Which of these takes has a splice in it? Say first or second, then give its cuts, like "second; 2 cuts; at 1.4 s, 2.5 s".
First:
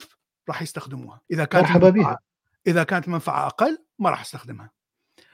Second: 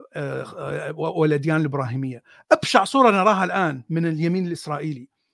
first; 1 cut; at 1.2 s